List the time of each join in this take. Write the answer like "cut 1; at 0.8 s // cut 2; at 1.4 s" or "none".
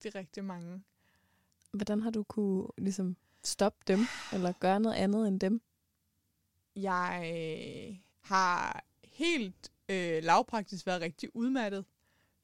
cut 1; at 8.1 s